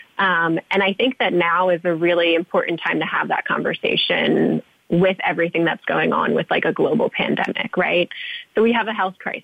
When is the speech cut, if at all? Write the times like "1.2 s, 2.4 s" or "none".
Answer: none